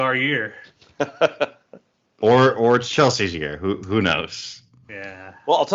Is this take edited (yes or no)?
no